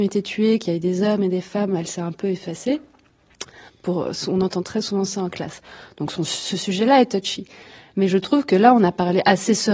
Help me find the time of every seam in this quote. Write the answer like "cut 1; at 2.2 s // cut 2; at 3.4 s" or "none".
cut 1; at 3.7 s